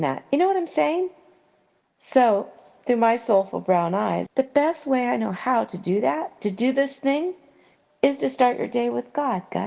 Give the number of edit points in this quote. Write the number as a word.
three